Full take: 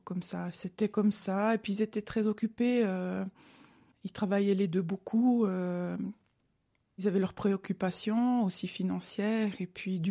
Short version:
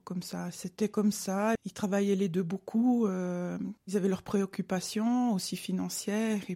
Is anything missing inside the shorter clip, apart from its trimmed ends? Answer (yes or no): yes